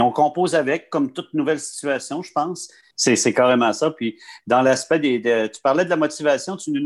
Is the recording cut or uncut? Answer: cut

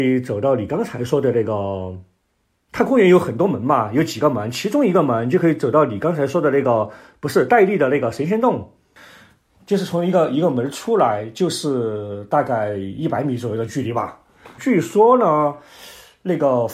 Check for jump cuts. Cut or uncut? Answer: cut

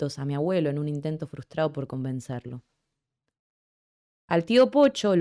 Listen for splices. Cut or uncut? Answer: uncut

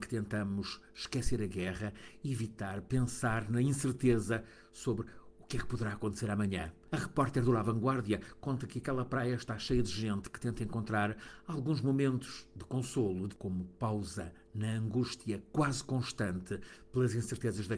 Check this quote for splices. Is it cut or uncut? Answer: uncut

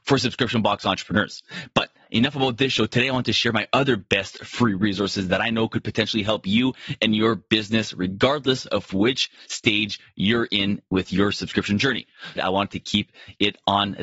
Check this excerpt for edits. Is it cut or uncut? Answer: cut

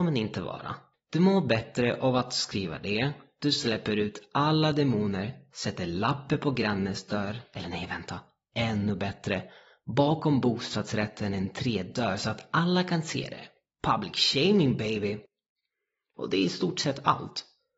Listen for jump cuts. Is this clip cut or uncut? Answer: cut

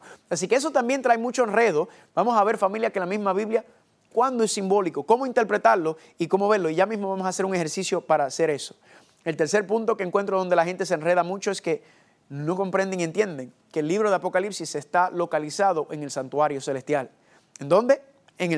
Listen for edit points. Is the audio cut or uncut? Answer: cut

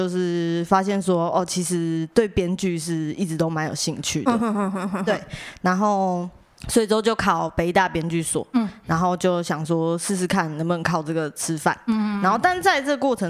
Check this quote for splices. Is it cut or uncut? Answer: uncut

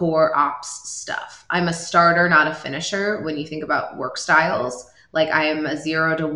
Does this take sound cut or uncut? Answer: uncut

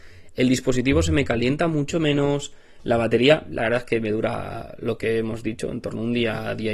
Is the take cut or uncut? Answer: uncut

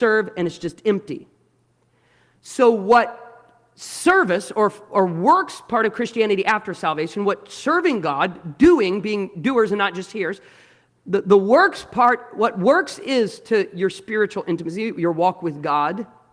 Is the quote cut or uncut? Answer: uncut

